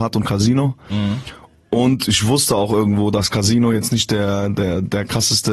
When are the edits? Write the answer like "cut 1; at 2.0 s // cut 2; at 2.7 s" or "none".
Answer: none